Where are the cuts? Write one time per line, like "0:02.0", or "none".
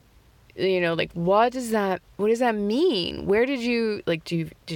none